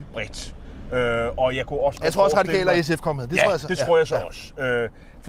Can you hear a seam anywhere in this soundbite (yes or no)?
no